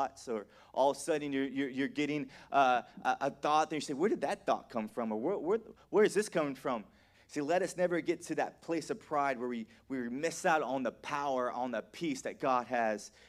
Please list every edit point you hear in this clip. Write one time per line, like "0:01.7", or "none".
0:07.1